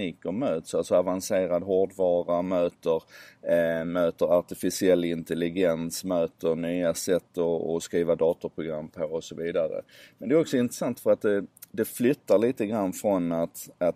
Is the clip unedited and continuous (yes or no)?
yes